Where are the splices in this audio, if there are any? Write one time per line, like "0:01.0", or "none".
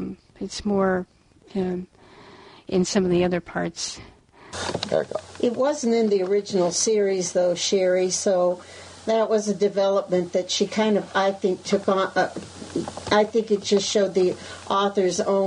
none